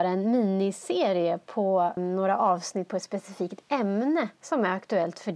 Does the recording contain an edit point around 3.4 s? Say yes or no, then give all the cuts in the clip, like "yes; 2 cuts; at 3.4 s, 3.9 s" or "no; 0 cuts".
no; 1 cut; at 2.0 s